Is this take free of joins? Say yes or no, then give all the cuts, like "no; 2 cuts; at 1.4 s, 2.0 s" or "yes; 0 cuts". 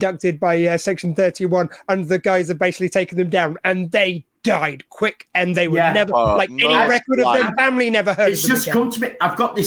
no; 1 cut; at 7.5 s